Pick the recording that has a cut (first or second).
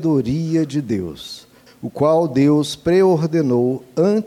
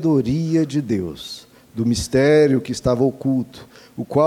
first